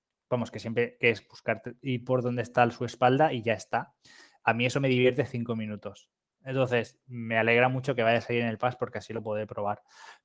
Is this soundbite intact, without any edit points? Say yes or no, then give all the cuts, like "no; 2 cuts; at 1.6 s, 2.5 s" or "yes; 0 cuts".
no; 1 cut; at 6.4 s